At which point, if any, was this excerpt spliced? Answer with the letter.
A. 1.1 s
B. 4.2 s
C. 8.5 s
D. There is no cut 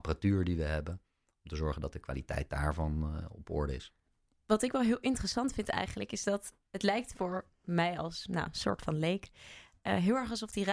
D